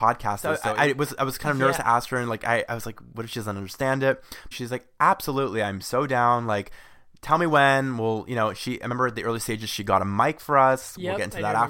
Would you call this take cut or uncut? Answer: cut